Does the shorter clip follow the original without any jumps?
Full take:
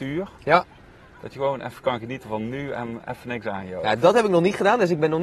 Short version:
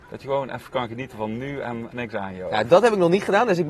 no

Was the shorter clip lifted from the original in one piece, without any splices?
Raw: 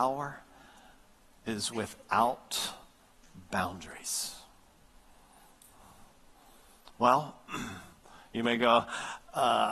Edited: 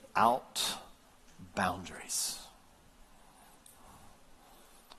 yes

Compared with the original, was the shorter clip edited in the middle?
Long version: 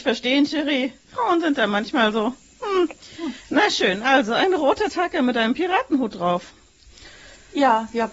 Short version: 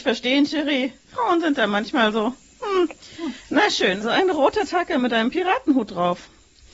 yes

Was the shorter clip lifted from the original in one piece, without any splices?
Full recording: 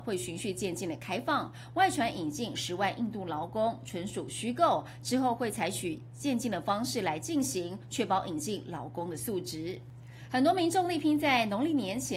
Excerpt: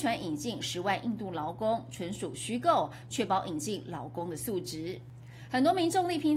no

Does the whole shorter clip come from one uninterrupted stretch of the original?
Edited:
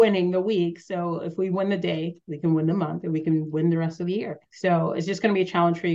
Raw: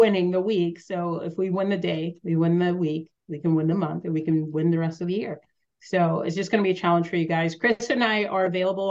no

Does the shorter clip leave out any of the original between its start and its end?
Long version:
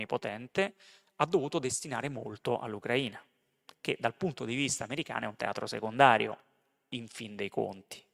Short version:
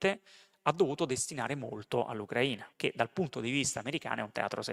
yes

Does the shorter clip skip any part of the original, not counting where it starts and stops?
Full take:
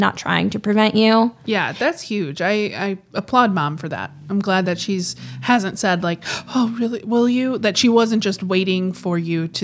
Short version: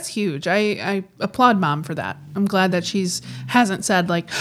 no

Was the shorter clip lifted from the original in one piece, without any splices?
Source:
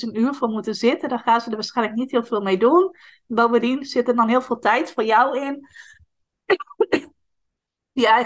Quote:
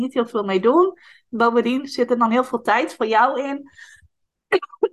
yes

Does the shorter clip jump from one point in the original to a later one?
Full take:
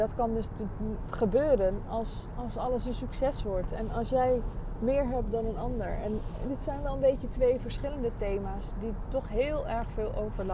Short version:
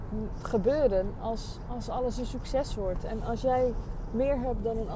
no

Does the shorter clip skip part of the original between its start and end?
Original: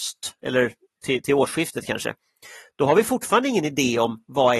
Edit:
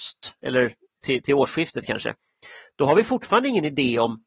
no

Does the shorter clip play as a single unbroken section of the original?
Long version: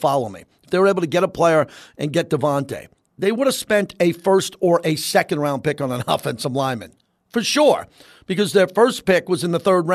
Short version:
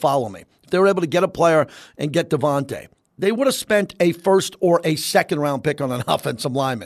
yes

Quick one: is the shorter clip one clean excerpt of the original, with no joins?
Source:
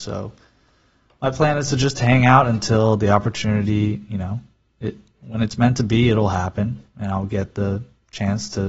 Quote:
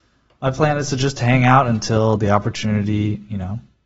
yes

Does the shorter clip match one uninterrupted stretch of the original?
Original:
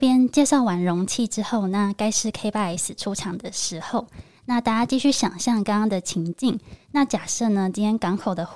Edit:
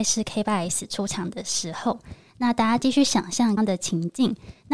no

